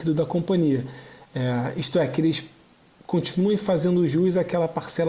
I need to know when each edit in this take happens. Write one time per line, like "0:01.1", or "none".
none